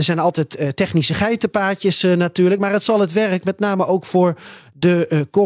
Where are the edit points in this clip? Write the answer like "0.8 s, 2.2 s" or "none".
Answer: none